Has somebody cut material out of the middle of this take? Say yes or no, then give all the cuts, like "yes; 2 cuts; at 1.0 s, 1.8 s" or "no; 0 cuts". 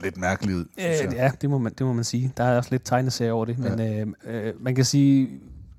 no; 0 cuts